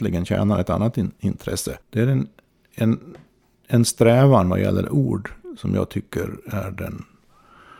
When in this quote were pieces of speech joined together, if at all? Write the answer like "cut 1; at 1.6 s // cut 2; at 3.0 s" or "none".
cut 1; at 1.8 s